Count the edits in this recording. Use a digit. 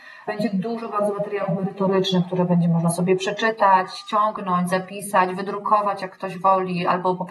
0